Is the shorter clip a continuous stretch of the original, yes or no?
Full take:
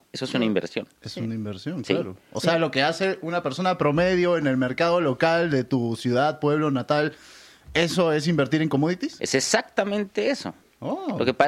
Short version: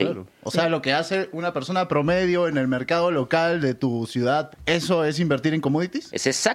no